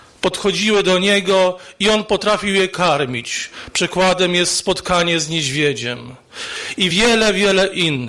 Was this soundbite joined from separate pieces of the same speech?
no; 0 cuts

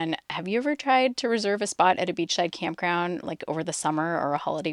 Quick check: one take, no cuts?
yes; 0 cuts

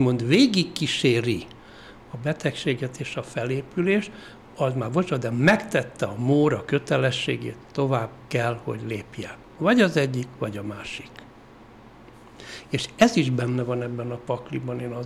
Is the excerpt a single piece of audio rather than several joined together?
yes; 0 cuts

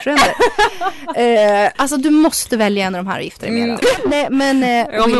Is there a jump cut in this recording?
yes; 2 cuts; at 1.7 s, 3.8 s

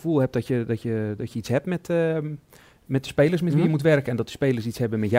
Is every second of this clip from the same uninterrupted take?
yes; 0 cuts

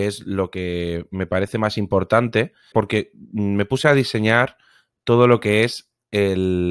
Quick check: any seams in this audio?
yes; 1 cut; at 2.7 s

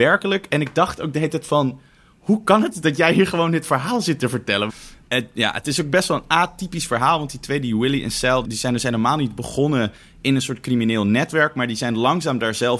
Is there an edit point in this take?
yes; 2 cuts; at 4.7 s, 8.4 s

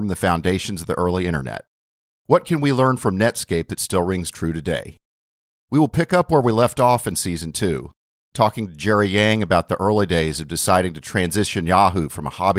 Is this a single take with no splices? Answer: yes; 0 cuts

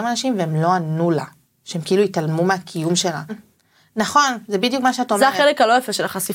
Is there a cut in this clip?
yes; 1 cut; at 3.3 s

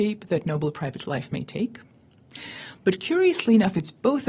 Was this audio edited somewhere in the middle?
no; 0 cuts

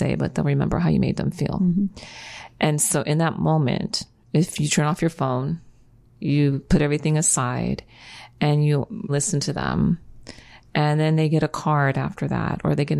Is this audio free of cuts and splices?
no; 1 cut; at 9.1 s

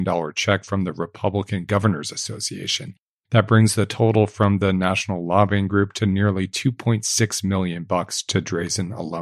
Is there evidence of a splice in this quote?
no; 0 cuts

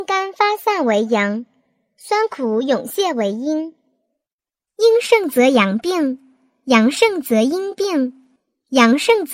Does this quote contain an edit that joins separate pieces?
no; 0 cuts

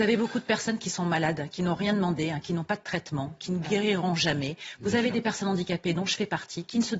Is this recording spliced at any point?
no; 0 cuts

